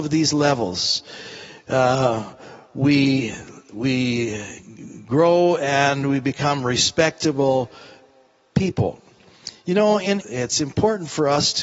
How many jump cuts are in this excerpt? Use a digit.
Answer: 1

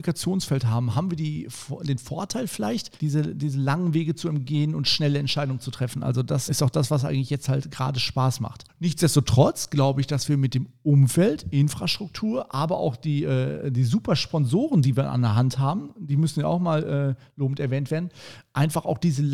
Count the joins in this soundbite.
2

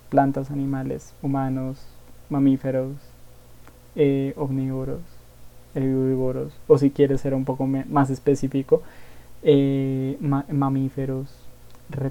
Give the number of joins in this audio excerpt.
1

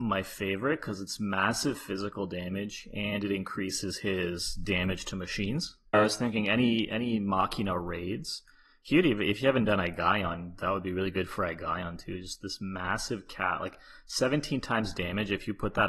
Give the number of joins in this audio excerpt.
1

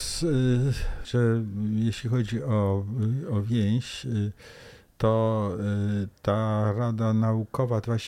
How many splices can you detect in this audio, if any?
1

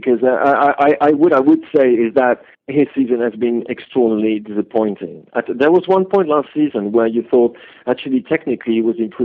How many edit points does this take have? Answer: 2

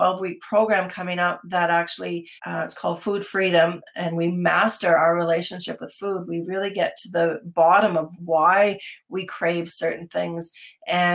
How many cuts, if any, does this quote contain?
1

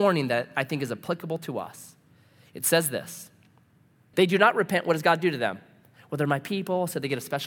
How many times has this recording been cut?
1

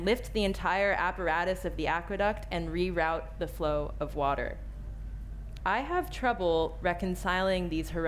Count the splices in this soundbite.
1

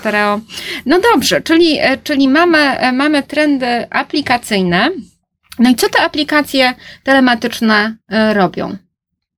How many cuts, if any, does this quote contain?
0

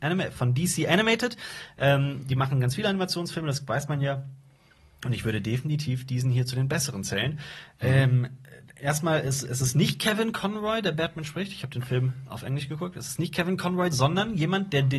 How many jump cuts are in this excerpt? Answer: 1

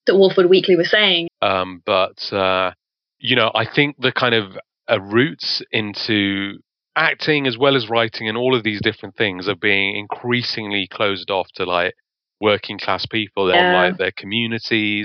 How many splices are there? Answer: 2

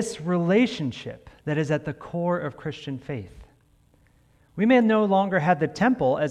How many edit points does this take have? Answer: 1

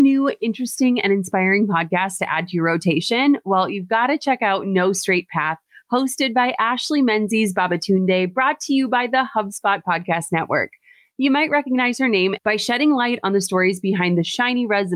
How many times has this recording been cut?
1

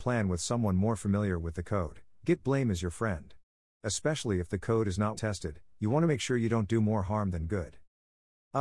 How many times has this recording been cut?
1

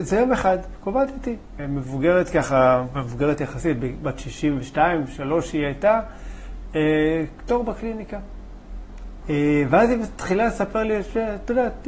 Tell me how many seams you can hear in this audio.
2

